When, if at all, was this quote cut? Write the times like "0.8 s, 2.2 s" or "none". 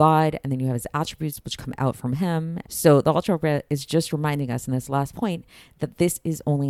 2.6 s